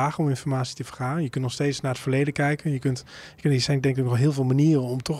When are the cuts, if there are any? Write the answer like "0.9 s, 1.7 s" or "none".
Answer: none